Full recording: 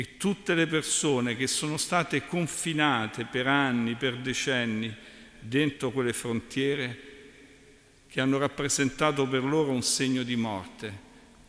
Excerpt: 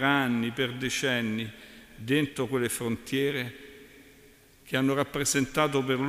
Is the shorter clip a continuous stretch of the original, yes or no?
yes